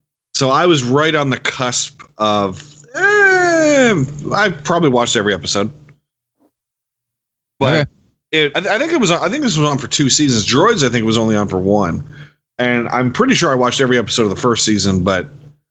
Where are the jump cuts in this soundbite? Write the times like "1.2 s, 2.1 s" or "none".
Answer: 8.5 s